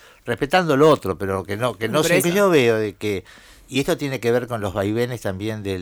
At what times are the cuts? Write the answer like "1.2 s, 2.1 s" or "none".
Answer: 2.2 s